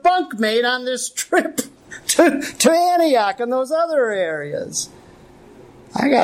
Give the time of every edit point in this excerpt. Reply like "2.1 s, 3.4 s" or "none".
none